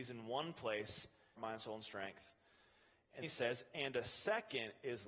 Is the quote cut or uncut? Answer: cut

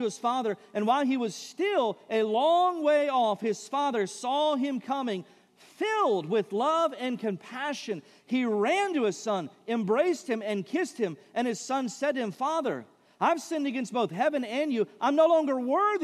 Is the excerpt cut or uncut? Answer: uncut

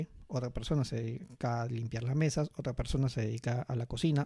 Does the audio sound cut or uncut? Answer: uncut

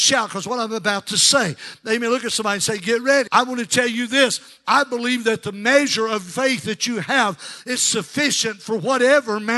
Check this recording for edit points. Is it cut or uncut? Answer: cut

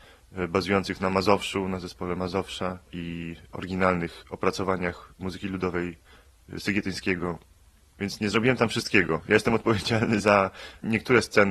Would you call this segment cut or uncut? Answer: uncut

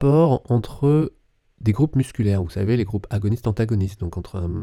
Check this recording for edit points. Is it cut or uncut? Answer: uncut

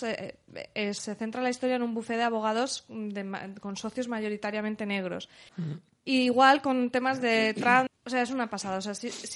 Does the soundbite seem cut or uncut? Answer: cut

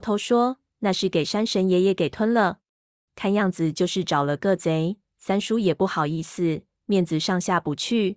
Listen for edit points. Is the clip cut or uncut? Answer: cut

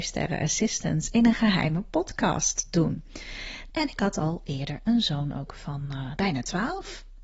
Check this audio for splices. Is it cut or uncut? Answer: cut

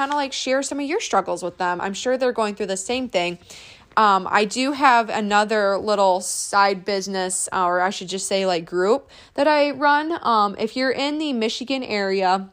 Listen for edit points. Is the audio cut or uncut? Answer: uncut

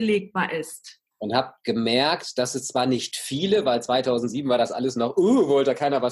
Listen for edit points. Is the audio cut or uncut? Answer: cut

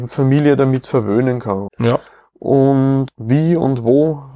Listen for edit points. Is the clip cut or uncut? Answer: cut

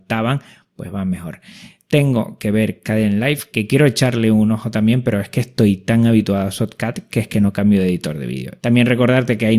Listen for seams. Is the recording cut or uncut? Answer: cut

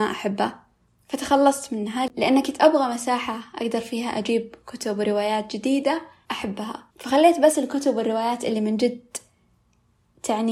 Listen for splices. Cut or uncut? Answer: cut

